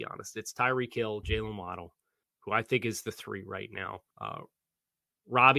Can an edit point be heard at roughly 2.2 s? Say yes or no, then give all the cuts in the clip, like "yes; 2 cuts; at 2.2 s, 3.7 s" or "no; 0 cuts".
yes; 2 cuts; at 2.2 s, 4.1 s